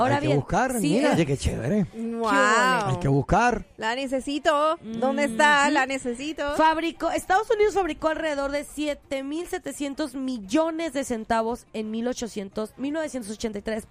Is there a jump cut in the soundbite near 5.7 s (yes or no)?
no